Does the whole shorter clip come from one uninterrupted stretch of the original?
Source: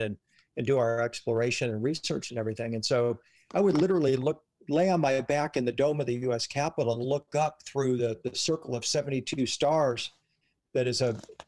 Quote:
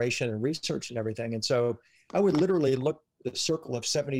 no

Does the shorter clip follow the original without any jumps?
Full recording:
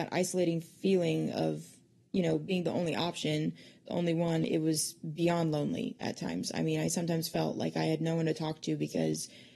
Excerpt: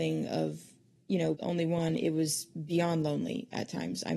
no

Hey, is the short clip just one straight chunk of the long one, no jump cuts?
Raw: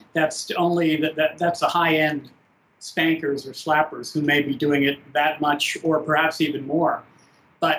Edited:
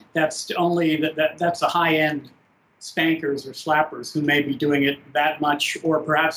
yes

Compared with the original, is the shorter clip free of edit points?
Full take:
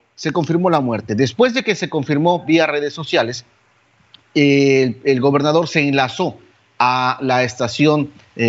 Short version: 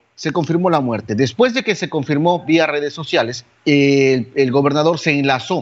no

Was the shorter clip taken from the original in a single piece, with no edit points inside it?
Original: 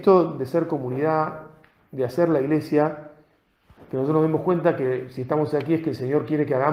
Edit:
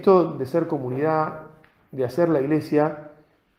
yes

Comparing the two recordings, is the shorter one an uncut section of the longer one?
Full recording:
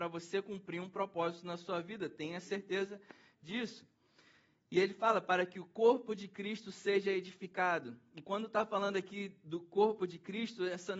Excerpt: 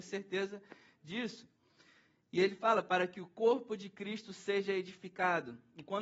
yes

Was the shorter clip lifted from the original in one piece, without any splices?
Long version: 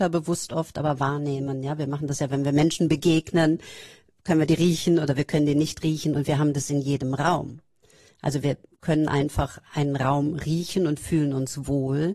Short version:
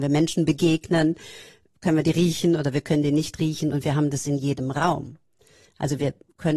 yes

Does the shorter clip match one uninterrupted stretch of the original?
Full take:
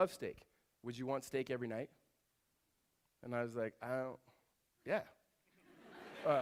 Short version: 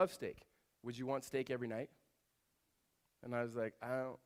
yes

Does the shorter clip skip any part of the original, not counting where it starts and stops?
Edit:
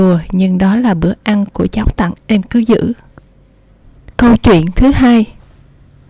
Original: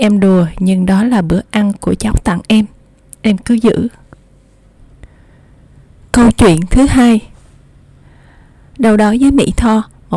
yes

